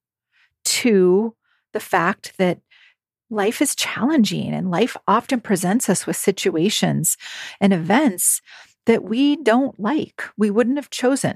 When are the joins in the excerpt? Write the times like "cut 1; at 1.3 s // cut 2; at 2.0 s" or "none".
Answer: none